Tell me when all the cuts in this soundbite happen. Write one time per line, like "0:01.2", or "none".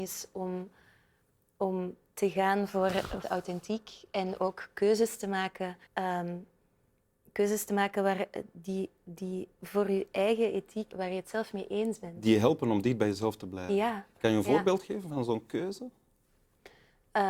0:03.2
0:05.9
0:10.9